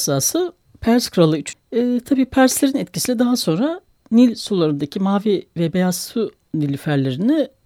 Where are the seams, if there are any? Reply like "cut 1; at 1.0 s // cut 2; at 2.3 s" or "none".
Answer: cut 1; at 1.5 s